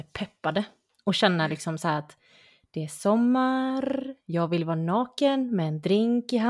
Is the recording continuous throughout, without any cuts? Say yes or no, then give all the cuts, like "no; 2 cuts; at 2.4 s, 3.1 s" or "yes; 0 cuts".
yes; 0 cuts